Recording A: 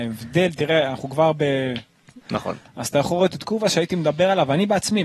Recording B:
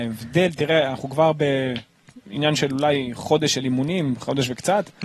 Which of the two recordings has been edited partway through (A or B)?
A